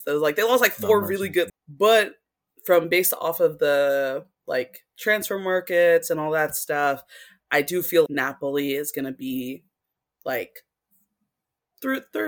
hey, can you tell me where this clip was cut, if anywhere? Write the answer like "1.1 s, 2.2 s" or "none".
1.5 s, 8.1 s

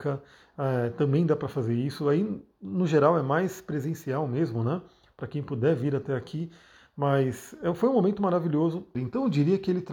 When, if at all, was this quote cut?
8.9 s

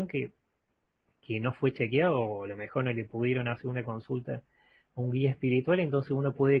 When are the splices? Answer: none

